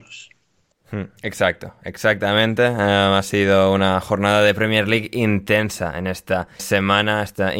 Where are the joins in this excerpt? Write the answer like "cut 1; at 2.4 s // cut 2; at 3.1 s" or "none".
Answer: cut 1; at 6.6 s